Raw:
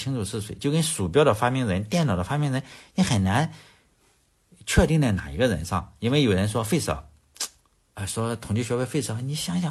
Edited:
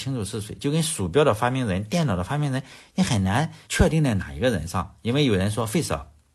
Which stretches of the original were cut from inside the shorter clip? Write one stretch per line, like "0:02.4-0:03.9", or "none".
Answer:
0:03.6-0:04.6

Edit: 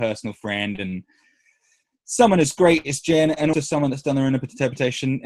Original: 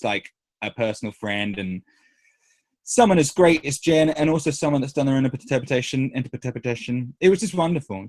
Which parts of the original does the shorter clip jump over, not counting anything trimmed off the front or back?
0:04.3-0:04.4

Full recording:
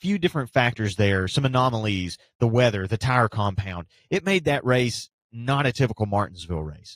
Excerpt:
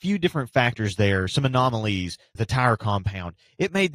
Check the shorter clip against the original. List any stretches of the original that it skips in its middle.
0:02.4-0:02.9

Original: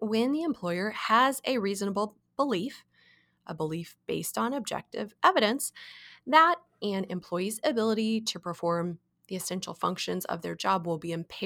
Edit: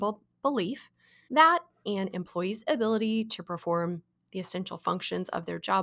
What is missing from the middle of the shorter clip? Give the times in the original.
0:03.2-0:06.2

